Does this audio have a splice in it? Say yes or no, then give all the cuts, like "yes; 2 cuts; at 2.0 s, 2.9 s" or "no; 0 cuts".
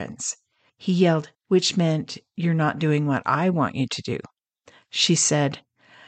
yes; 1 cut; at 1.3 s